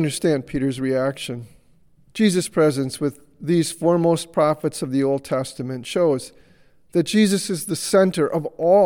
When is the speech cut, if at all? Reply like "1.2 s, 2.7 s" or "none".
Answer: 2.1 s